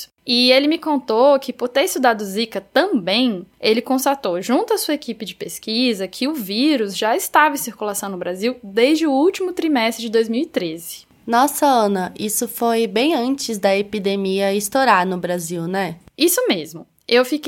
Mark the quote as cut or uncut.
uncut